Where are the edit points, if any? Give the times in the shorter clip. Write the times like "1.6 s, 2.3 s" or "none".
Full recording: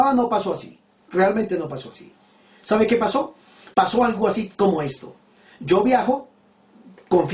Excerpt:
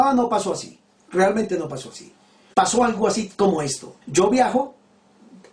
2.5 s, 4.0 s